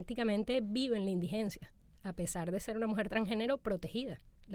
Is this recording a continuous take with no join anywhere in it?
yes; 0 cuts

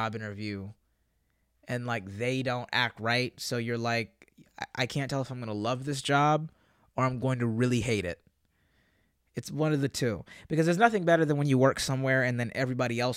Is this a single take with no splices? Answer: yes; 0 cuts

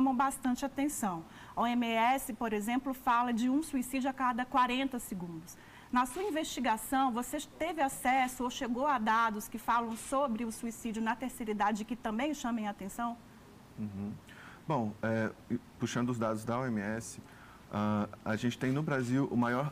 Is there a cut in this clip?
no; 0 cuts

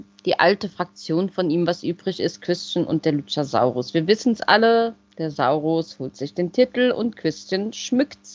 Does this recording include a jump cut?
no; 0 cuts

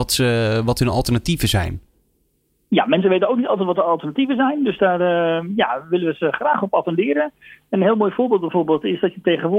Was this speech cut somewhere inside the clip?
no; 0 cuts

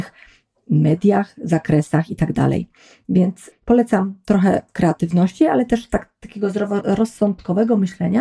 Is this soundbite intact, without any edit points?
yes; 0 cuts

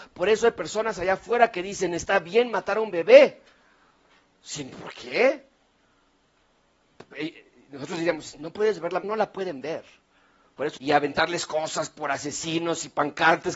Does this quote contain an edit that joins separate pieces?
yes; 2 cuts; at 9.0 s, 10.8 s

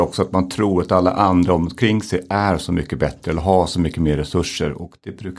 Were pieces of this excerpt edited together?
no; 0 cuts

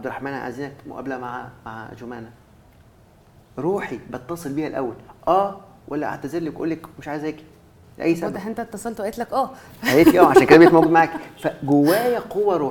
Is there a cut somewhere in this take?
no; 0 cuts

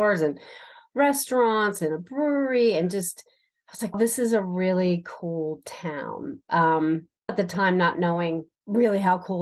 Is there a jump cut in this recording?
yes; 2 cuts; at 3.9 s, 7.3 s

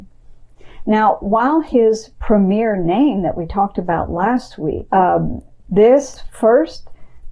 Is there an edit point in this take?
yes; 1 cut; at 4.9 s

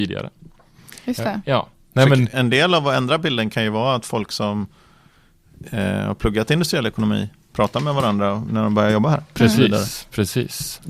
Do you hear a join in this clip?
yes; 1 cut; at 2.3 s

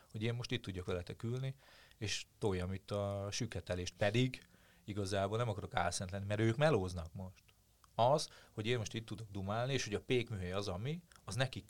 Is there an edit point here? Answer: no; 0 cuts

